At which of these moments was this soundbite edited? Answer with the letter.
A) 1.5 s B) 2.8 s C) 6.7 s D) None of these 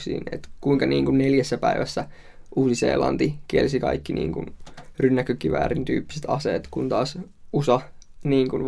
D